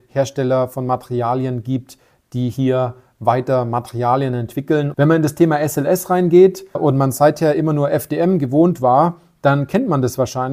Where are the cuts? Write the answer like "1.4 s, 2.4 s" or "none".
4.9 s, 6.7 s

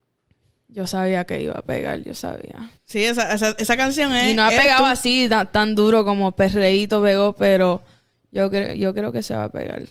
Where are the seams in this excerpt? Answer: 2.7 s

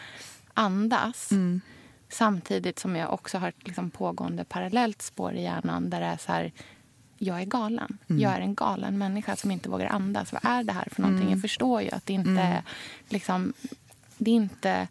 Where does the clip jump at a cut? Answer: none

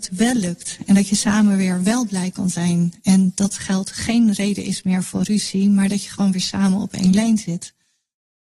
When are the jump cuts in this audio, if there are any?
none

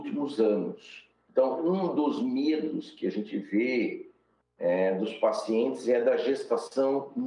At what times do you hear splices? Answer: 1.3 s

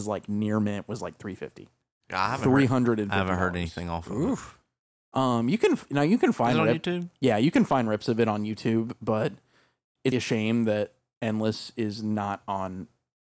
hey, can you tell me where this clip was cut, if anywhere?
10.1 s

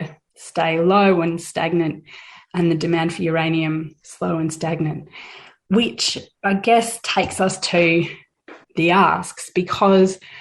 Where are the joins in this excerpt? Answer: 8.6 s

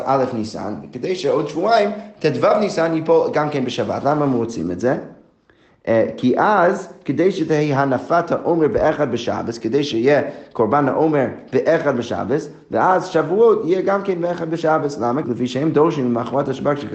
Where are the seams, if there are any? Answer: 15.2 s

